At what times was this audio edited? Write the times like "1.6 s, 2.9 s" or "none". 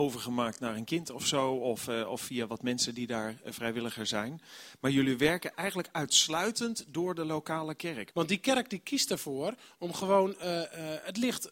8.1 s